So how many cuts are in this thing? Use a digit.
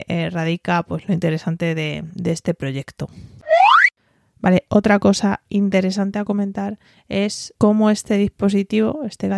1